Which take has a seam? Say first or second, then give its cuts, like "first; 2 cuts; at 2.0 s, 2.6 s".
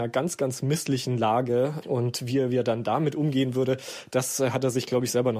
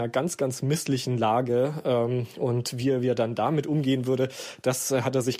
first; 1 cut; at 1.8 s